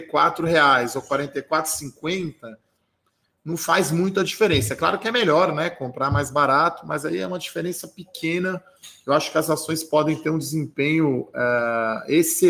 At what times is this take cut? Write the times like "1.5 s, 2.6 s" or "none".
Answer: none